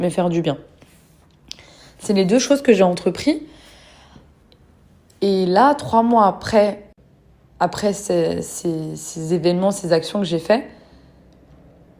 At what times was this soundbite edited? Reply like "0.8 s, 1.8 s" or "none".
none

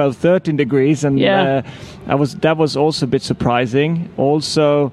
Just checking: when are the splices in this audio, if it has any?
none

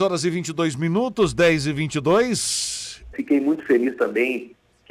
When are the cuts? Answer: 3.1 s

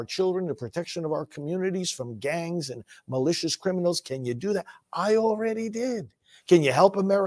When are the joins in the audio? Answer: none

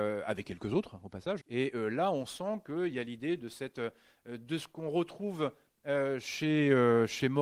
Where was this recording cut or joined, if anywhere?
1.4 s

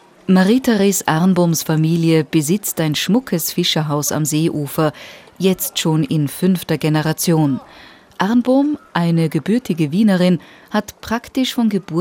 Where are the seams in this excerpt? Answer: none

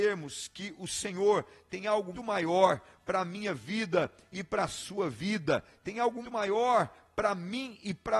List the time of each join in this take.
2.1 s, 6.2 s

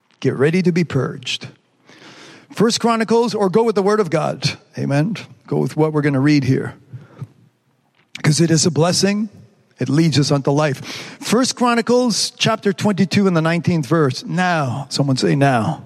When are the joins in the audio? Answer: none

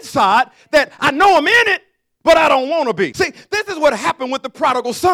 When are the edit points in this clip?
3.1 s

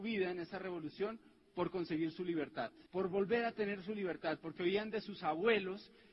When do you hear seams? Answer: 2.9 s

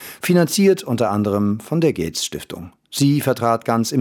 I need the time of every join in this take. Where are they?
2.8 s

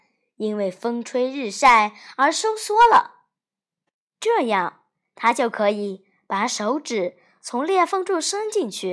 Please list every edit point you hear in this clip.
none

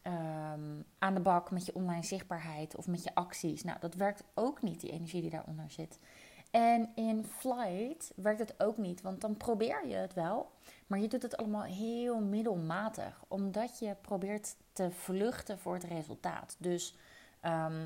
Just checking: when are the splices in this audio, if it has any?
none

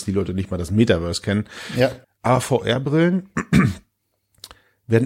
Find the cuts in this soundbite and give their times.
2.0 s

